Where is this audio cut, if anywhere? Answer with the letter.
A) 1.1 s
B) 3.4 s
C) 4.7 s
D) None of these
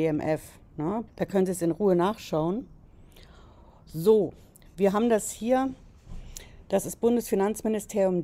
A